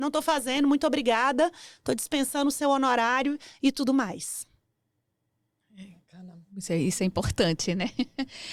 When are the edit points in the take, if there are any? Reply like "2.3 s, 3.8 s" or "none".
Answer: none